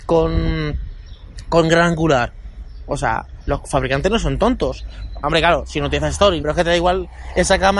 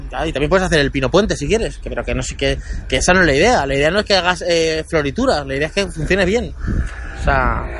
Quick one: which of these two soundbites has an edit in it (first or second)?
first